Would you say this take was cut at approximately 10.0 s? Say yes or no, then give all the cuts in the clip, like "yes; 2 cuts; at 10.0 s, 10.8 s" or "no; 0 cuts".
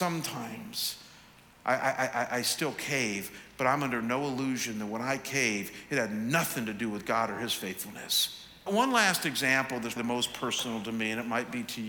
yes; 2 cuts; at 8.7 s, 10.0 s